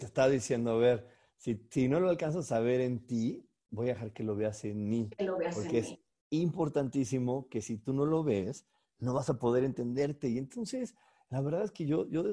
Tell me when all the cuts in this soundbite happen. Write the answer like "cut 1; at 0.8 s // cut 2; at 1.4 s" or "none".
none